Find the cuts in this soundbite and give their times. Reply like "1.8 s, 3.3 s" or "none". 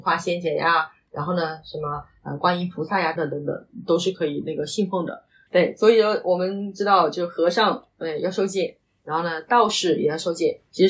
3.2 s, 5.5 s